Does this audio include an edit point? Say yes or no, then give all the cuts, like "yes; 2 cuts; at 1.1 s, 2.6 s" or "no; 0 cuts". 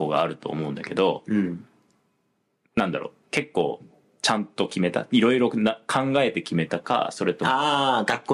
no; 0 cuts